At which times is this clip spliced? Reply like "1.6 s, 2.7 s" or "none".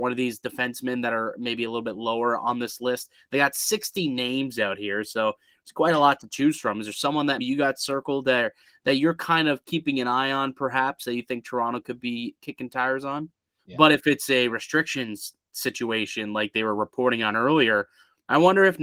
7.4 s, 13.6 s